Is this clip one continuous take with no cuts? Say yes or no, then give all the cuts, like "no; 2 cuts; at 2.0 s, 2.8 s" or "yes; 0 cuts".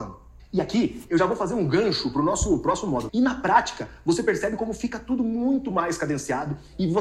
no; 1 cut; at 3.1 s